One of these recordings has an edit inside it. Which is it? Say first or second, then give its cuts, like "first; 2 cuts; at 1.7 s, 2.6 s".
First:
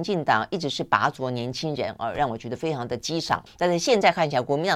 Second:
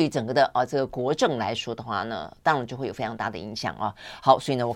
first; 1 cut; at 3.5 s